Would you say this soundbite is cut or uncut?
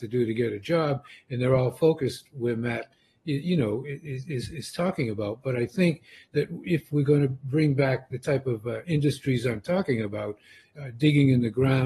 uncut